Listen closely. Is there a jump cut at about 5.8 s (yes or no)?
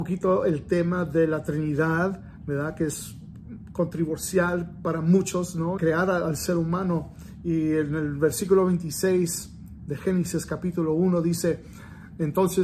yes